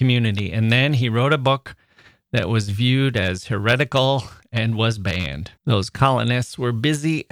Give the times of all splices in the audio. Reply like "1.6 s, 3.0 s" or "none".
5.6 s